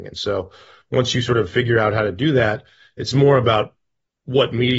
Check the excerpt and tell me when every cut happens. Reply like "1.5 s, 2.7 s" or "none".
none